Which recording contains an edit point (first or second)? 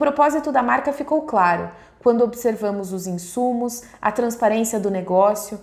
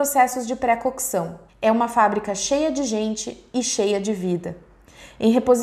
second